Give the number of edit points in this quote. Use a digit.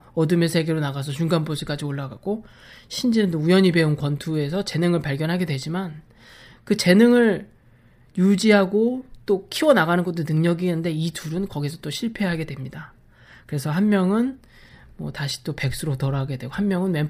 0